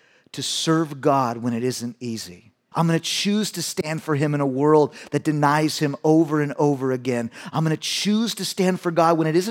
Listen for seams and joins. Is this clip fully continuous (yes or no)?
no